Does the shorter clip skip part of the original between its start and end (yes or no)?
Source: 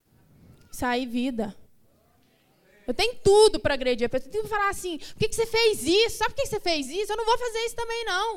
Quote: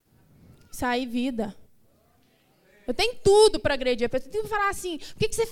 no